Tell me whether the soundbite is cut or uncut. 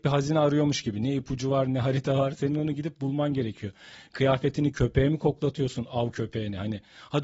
uncut